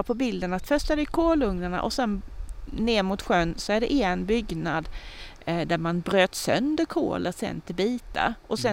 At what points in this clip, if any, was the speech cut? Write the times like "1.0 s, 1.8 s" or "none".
none